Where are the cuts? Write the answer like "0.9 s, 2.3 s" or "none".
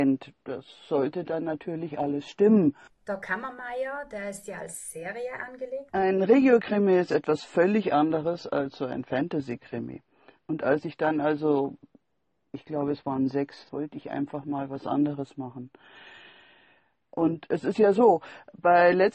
2.9 s, 5.9 s, 13.7 s